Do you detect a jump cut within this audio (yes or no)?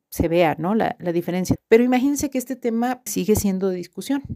yes